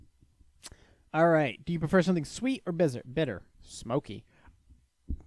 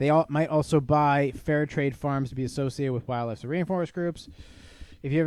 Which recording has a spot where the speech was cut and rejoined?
first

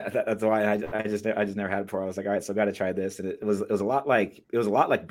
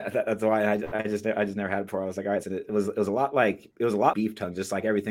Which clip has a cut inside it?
second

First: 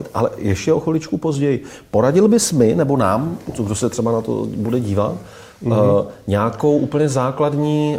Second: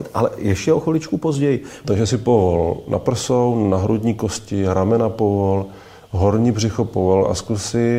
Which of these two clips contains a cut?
second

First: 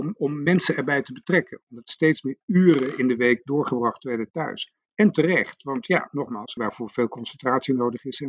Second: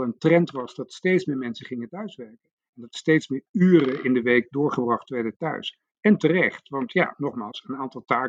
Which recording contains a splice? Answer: first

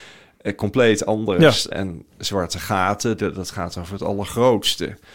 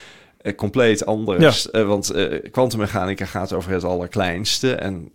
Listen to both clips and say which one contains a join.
first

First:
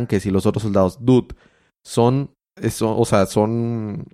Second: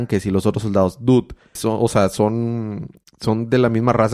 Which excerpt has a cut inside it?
second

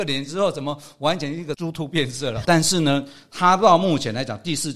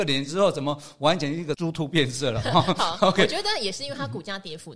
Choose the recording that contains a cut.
first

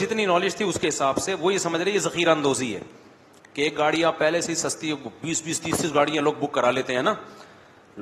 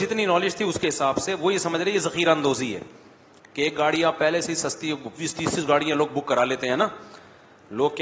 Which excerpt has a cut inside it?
second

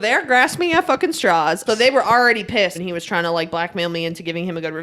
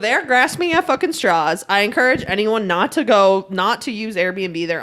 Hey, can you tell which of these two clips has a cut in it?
first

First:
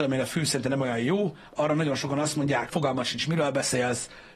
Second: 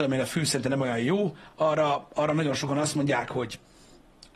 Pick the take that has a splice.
first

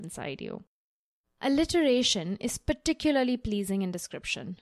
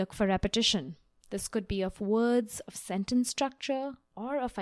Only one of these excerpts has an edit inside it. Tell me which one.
first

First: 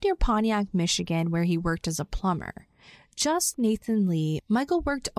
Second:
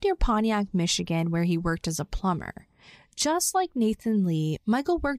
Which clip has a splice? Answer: first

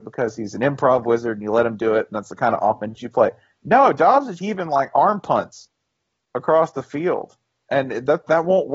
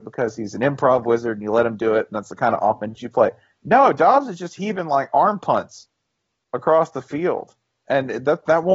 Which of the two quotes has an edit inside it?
first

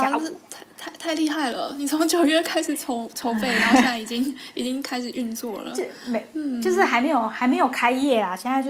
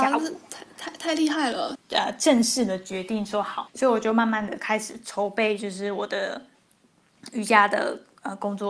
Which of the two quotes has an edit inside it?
second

